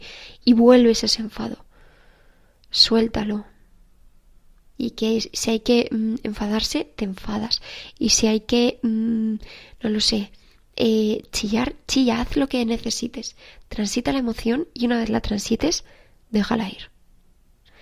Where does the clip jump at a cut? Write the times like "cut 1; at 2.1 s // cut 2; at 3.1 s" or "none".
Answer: cut 1; at 4.7 s